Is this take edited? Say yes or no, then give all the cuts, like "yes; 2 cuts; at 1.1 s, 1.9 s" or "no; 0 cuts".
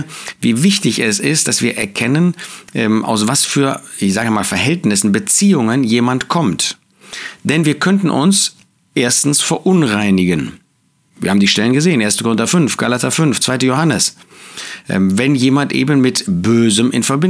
no; 0 cuts